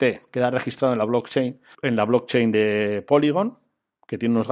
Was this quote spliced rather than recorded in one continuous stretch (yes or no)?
yes